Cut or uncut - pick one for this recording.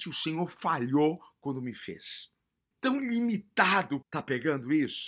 cut